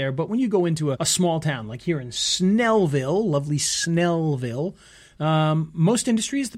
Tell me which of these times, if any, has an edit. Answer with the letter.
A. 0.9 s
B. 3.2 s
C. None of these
A